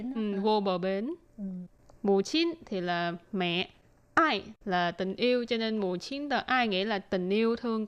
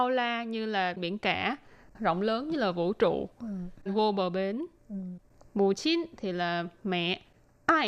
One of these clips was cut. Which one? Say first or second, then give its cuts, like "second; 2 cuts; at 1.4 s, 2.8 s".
second; 1 cut; at 3.9 s